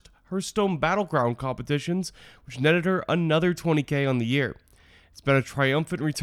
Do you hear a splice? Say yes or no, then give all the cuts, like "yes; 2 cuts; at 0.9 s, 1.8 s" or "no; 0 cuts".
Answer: no; 0 cuts